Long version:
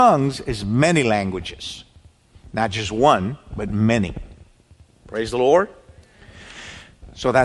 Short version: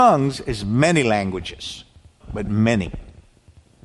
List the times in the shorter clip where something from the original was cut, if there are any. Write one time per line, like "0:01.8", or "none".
0:02.2